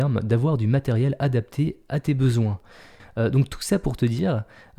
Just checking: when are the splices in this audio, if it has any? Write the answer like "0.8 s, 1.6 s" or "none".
3.0 s

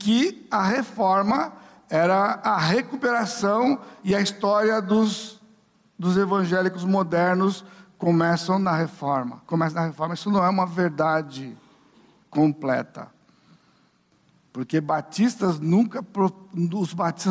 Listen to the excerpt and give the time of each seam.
none

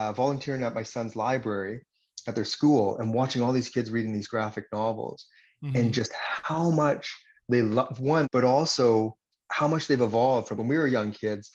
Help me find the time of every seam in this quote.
8.2 s, 10.6 s

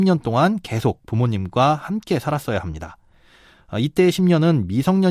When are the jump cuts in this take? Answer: none

